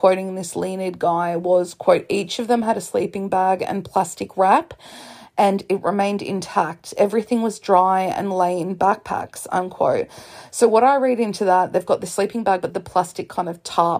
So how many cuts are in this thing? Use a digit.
1